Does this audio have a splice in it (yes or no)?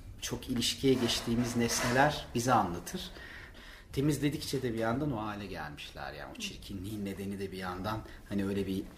yes